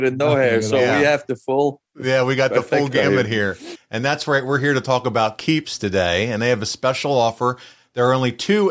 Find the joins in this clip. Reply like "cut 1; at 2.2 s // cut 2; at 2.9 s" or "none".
cut 1; at 3.7 s